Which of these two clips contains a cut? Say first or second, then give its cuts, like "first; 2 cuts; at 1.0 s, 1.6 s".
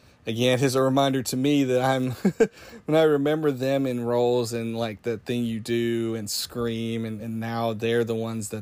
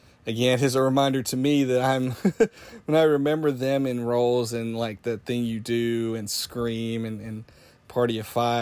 first; 1 cut; at 7.2 s